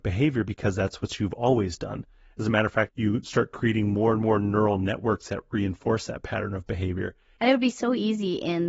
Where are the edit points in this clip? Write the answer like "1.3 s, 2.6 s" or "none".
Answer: 2.9 s, 7.4 s

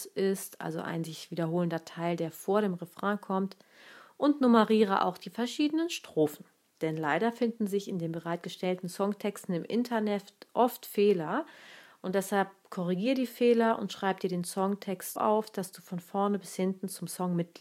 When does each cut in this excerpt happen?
6.8 s, 15.2 s

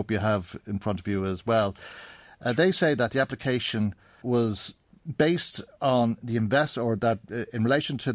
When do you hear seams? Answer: 4.2 s

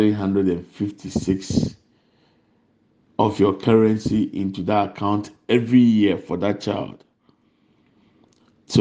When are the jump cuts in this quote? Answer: none

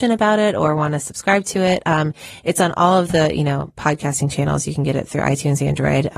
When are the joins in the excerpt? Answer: none

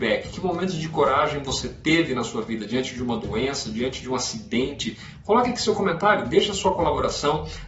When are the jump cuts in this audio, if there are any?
5.2 s

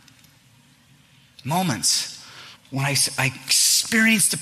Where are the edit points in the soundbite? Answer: 2.6 s

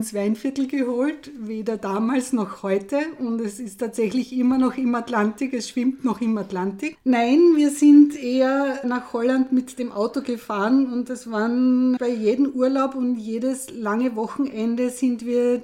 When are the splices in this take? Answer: 6.9 s, 8.8 s, 12.0 s

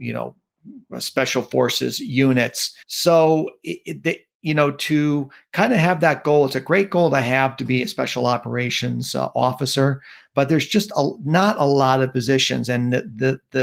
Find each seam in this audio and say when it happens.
2.8 s

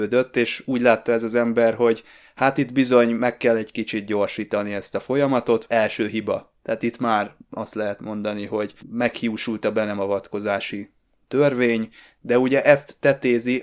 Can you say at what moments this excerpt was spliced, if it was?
8.8 s

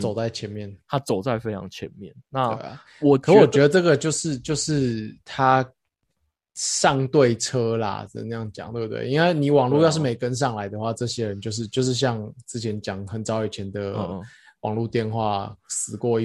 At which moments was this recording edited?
none

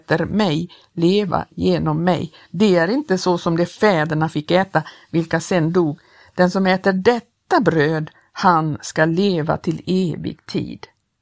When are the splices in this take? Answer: 2.4 s

